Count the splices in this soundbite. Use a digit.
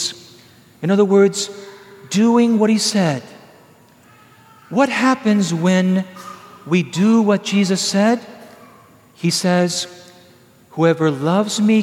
0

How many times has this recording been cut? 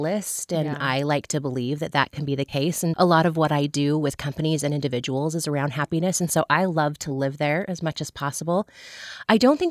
1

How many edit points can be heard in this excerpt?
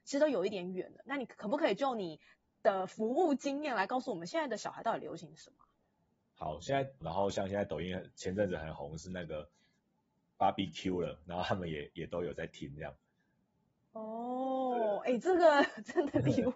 1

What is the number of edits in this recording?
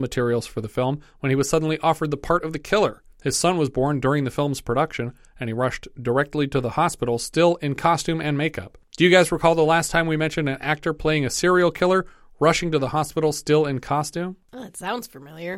1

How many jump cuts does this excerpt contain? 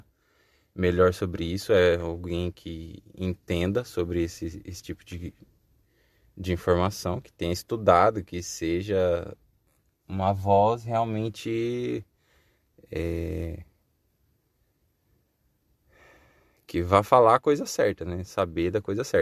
0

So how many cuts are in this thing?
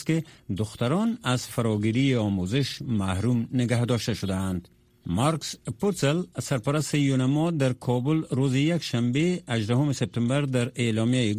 0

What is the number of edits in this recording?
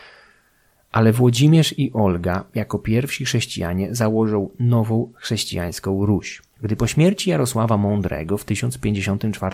1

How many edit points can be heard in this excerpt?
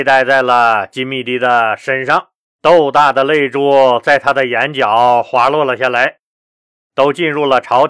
2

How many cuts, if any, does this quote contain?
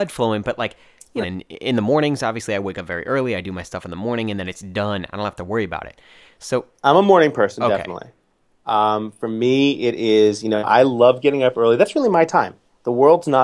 1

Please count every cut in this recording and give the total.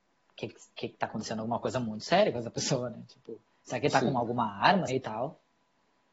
1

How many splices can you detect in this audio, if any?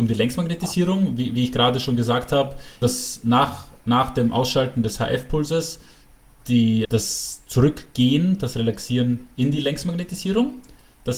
2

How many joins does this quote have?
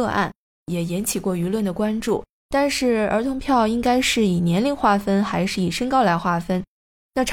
1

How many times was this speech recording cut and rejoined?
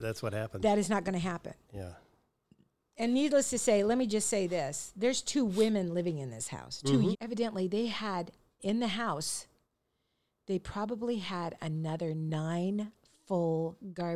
2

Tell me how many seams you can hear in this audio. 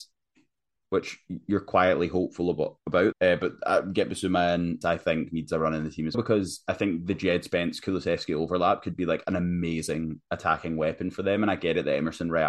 3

